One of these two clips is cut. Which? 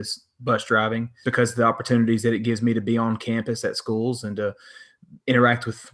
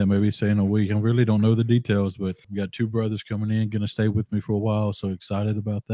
first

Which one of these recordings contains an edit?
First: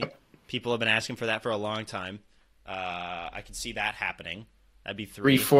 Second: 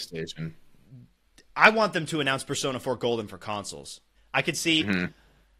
second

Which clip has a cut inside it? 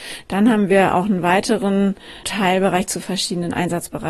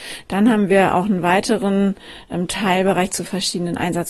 first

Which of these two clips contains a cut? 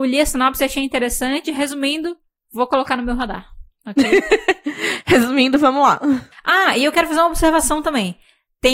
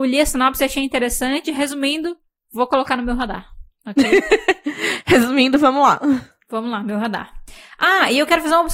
first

